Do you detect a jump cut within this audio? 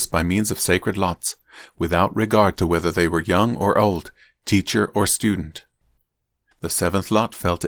yes; 1 cut; at 6.5 s

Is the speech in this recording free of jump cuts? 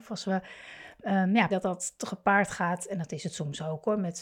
no; 1 cut; at 1.5 s

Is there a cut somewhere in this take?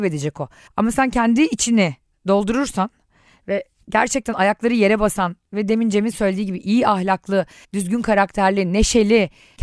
no; 0 cuts

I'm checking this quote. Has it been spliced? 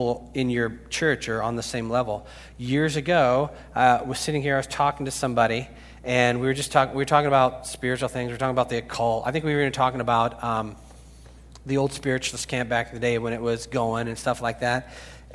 no; 0 cuts

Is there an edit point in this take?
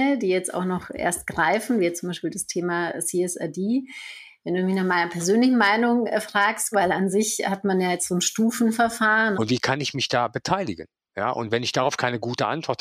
yes; 2 cuts; at 6.7 s, 9.3 s

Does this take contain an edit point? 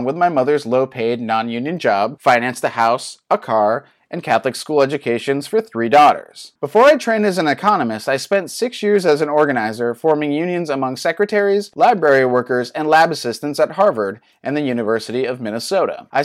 no; 0 cuts

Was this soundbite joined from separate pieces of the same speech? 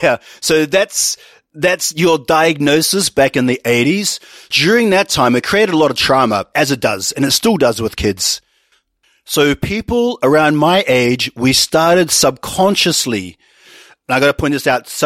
no; 0 cuts

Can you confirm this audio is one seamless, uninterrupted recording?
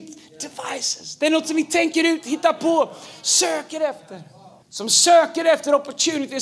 no; 1 cut; at 4.6 s

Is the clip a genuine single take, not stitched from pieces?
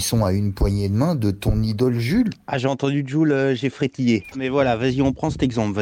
no; 1 cut; at 4.3 s

